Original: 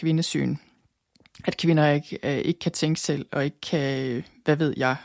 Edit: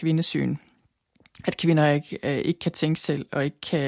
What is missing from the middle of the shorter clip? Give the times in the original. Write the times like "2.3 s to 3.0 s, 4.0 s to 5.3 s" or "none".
none